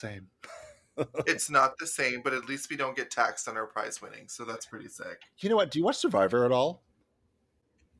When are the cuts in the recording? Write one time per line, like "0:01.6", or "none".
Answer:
none

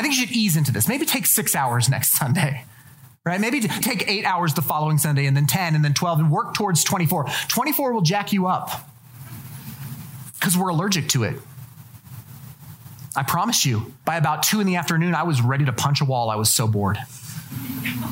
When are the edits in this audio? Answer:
0:03.8
0:14.0

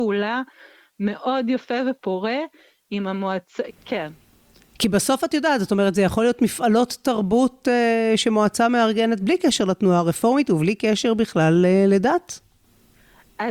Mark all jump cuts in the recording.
0:03.7

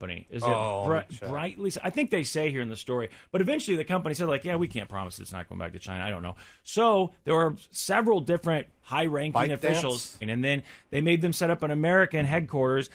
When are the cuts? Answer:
0:10.2

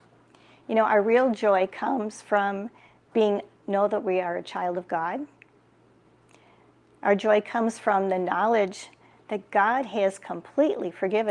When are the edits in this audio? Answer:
none

